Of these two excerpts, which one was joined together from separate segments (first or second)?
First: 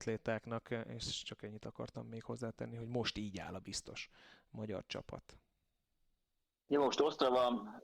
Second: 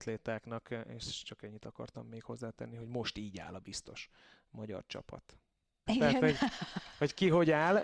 second